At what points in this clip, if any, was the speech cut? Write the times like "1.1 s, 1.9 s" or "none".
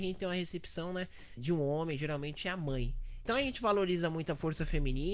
1.4 s, 3.3 s